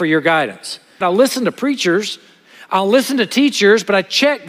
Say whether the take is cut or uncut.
cut